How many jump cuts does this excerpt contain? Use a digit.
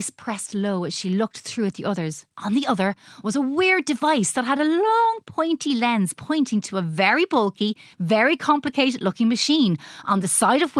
1